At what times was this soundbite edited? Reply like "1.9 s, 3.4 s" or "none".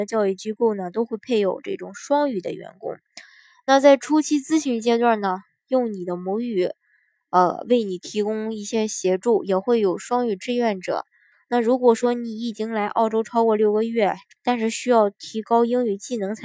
11.3 s, 14.4 s